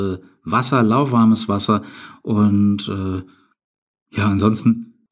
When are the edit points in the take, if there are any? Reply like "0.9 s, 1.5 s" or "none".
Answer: none